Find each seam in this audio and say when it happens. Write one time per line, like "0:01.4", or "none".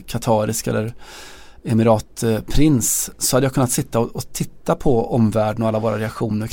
0:03.2